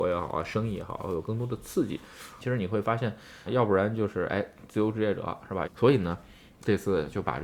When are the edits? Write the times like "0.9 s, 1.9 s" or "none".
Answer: 2.4 s, 3.5 s, 5.6 s